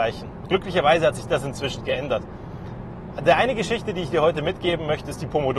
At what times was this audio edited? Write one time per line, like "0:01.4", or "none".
none